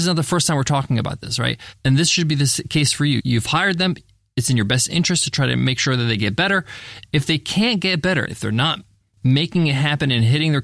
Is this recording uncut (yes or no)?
no